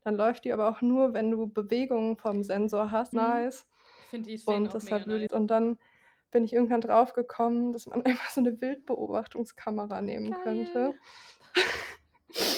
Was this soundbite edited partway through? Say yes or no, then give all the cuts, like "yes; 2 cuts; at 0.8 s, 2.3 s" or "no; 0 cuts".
yes; 2 cuts; at 3.1 s, 5.3 s